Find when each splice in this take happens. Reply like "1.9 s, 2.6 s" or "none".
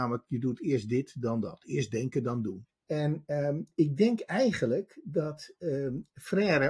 2.7 s